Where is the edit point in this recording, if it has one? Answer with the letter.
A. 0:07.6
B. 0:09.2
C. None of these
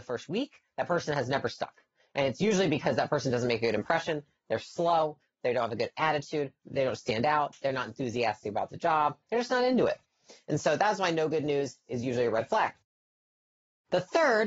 B